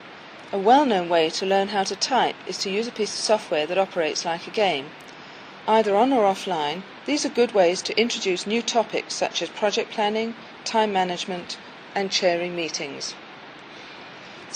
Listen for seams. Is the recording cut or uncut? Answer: cut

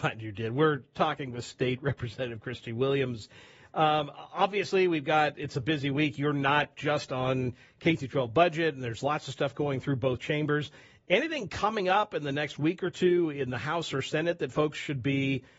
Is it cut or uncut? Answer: uncut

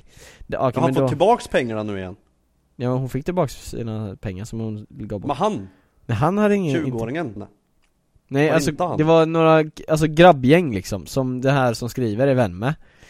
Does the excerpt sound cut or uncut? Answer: cut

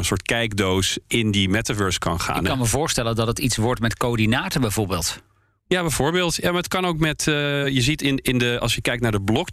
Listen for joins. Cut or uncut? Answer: uncut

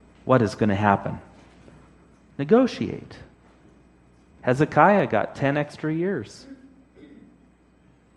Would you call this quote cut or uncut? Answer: uncut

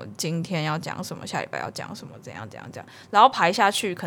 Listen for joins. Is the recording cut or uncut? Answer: uncut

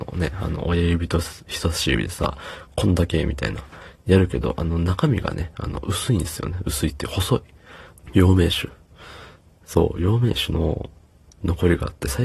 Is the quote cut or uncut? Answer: cut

